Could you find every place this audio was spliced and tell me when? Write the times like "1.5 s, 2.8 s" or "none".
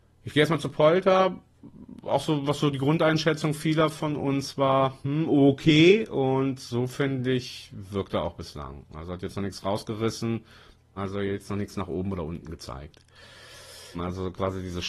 11.0 s, 13.9 s